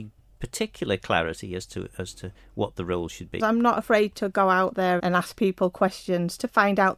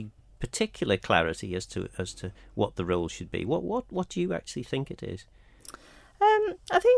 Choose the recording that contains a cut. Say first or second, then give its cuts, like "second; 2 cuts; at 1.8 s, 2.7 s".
first; 2 cuts; at 3.4 s, 5.0 s